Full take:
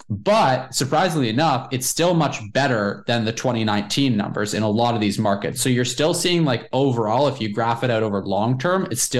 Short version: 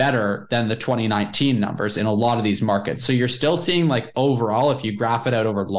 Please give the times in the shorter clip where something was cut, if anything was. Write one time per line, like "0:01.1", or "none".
none

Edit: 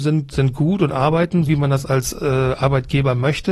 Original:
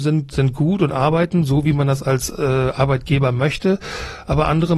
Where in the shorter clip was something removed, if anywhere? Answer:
0:01.4

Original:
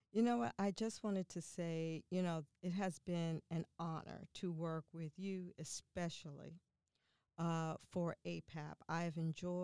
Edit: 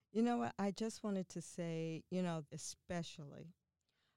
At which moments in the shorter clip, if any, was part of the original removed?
0:02.5

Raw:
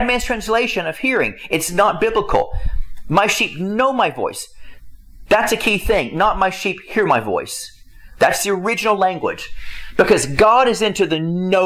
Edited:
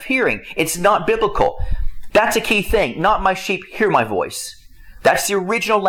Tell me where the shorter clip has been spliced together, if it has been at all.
0:02.1

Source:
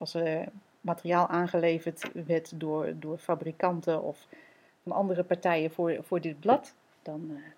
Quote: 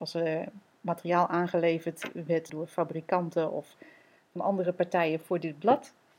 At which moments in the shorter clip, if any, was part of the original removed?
0:02.5
0:05.2

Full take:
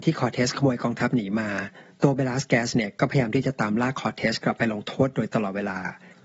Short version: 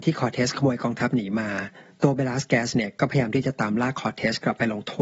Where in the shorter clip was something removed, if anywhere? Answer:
none

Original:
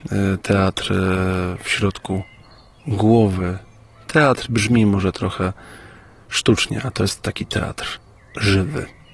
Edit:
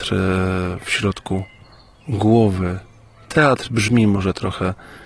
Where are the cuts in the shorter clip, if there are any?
none

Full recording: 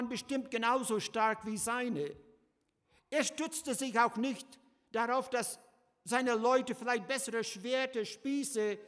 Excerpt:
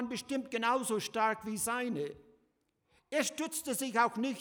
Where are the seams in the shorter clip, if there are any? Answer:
none

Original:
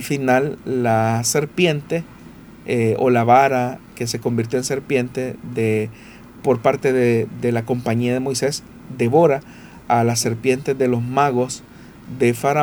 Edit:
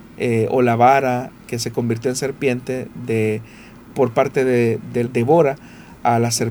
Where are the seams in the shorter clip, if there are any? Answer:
0:05.0

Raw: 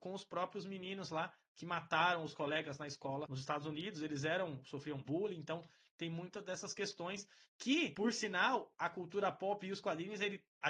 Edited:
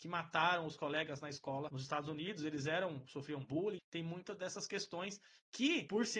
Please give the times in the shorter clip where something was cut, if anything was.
0:03.8

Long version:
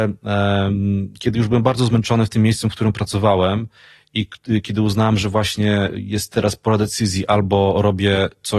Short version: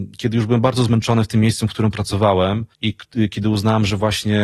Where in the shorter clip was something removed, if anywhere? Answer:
0:02.7

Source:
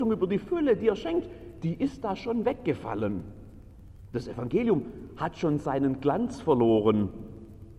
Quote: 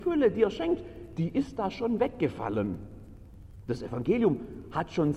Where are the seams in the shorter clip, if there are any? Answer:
none

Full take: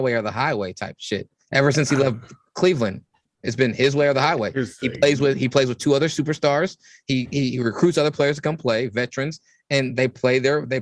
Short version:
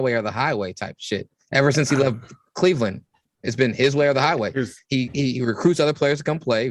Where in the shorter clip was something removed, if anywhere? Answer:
0:04.8

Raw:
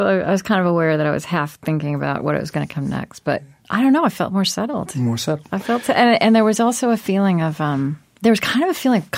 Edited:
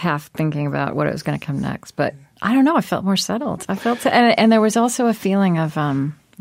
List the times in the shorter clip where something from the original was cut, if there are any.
0:03.6

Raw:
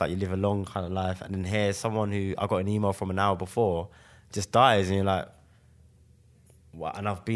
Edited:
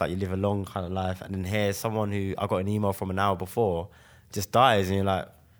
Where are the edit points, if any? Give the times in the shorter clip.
none

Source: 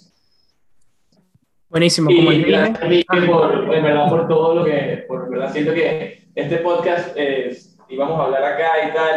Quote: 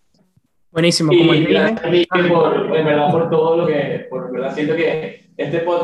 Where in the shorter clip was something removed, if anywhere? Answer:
none

